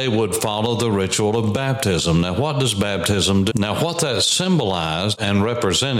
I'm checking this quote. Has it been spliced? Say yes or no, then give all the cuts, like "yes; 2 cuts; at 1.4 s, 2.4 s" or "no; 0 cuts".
yes; 1 cut; at 3.5 s